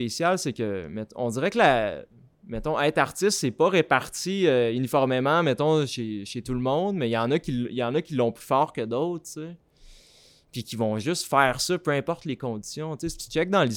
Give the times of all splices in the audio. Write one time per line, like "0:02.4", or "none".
none